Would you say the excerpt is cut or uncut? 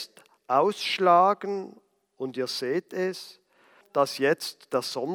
cut